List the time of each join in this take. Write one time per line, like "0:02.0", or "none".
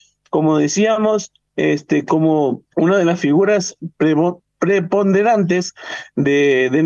0:02.7